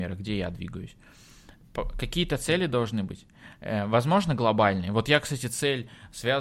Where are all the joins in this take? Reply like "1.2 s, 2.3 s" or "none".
none